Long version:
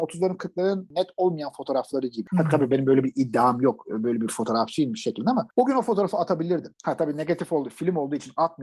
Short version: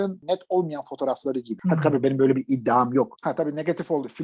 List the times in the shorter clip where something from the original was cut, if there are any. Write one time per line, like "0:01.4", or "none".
0:03.2